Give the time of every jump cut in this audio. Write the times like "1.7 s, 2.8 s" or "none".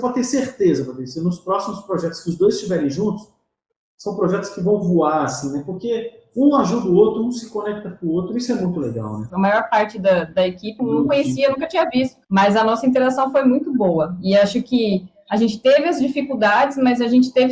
9.3 s, 10.8 s, 12.2 s